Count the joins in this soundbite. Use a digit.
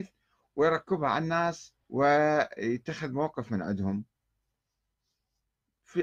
1